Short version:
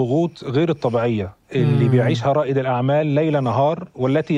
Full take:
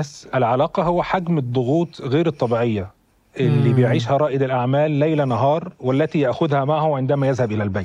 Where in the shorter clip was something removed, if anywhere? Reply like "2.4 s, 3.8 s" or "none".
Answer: 1.4 s